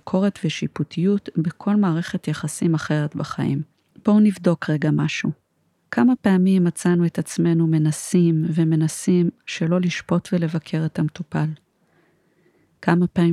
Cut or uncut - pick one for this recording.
cut